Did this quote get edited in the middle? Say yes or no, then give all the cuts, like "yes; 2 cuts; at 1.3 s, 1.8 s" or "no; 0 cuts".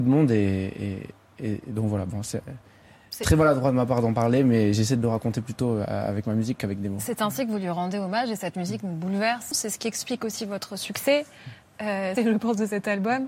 yes; 2 cuts; at 9.5 s, 12.2 s